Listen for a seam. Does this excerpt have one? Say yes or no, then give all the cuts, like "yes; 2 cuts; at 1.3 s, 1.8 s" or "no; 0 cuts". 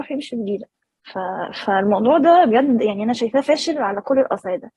no; 0 cuts